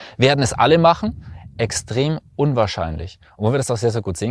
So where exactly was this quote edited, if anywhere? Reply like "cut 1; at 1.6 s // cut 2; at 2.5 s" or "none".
none